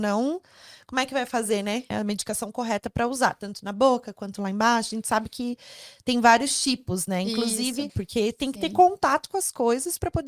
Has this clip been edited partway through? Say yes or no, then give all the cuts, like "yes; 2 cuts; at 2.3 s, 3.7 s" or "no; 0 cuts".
yes; 2 cuts; at 1.9 s, 7.9 s